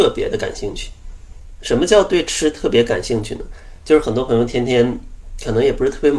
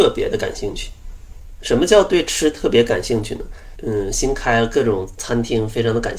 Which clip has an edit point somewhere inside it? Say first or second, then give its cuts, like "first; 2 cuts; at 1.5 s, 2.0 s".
second; 1 cut; at 3.8 s